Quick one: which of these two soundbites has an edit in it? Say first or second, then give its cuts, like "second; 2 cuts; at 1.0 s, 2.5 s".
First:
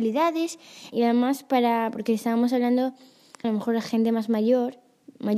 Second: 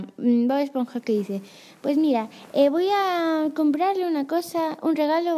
first; 2 cuts; at 0.9 s, 3.4 s